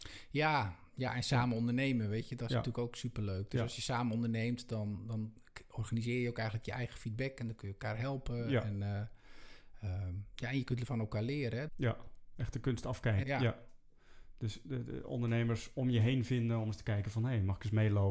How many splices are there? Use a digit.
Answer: 2